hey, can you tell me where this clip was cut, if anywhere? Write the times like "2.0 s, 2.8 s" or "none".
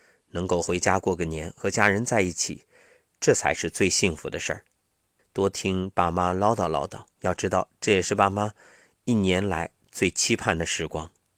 5.2 s, 7.1 s